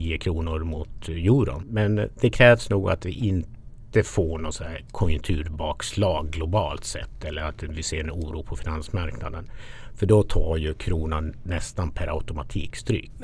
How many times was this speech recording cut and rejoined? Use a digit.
0